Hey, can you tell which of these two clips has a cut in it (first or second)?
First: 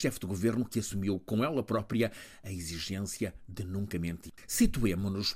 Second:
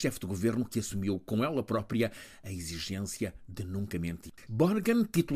second